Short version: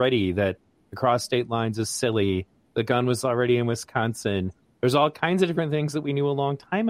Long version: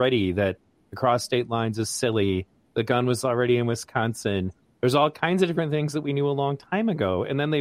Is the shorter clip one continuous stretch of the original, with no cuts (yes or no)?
yes